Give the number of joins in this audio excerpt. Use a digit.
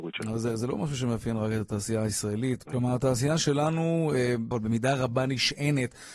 2